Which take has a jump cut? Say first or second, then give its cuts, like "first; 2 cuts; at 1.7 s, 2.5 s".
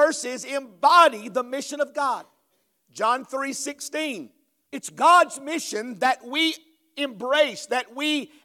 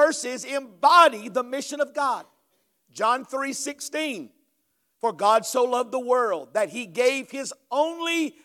first; 1 cut; at 4.7 s